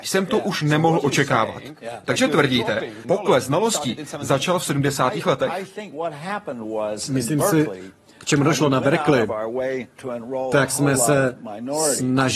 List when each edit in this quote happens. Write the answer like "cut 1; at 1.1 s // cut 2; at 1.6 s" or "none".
cut 1; at 3.0 s